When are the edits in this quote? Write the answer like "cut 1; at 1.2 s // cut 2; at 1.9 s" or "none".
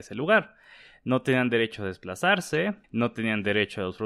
cut 1; at 2.8 s